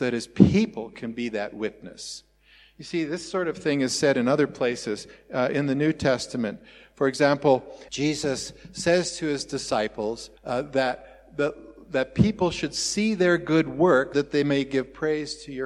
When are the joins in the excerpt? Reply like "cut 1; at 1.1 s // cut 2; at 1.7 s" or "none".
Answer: cut 1; at 7.9 s // cut 2; at 10.4 s // cut 3; at 14.1 s